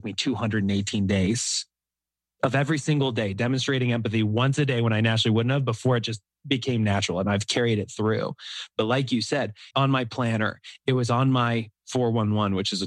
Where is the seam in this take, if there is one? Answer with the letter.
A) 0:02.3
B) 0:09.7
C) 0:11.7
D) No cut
B